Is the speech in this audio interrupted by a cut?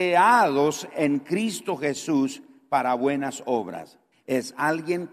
yes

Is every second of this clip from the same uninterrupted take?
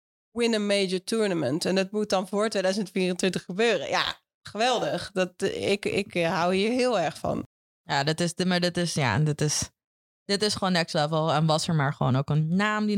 yes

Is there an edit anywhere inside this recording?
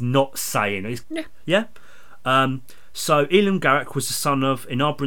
yes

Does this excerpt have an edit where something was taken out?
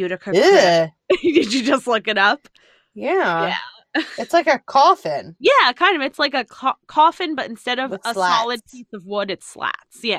no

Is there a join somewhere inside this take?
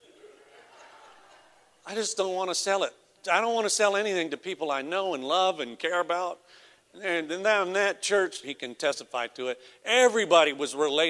yes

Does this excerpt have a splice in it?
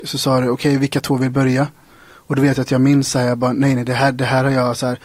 no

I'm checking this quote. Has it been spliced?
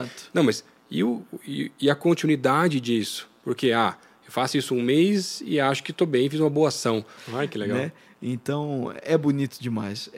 yes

